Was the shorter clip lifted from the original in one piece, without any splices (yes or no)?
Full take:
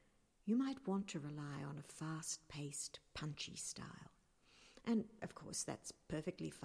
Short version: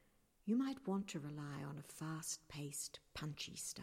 yes